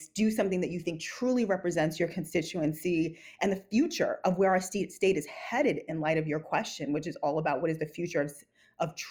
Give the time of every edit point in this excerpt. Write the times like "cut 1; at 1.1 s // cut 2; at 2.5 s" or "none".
none